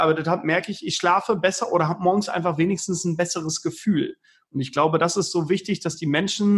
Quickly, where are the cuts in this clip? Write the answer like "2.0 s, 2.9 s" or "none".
none